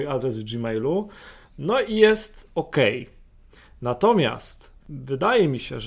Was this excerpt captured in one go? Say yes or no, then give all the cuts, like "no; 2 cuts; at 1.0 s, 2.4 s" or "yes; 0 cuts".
yes; 0 cuts